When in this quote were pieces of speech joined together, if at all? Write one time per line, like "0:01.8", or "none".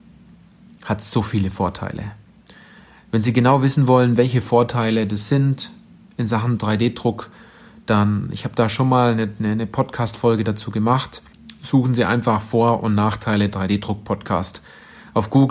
none